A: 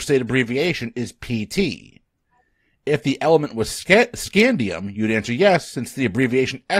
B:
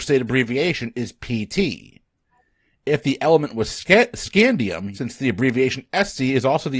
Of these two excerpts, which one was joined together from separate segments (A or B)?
B